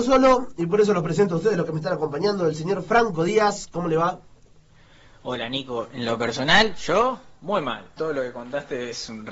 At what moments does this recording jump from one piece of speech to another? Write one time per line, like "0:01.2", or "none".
0:08.0